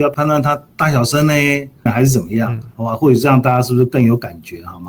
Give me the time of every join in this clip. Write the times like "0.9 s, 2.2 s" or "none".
1.9 s